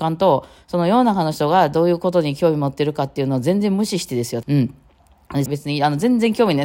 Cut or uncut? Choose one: cut